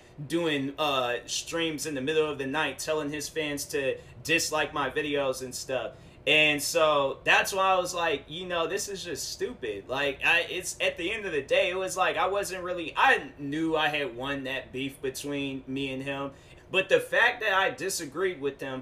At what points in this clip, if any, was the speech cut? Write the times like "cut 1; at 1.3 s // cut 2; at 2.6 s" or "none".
cut 1; at 16.5 s